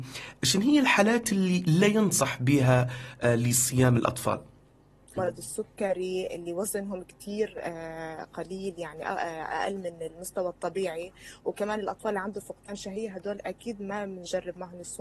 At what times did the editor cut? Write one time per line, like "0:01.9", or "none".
0:05.2